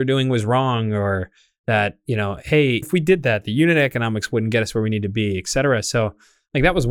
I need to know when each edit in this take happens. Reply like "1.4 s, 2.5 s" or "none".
2.8 s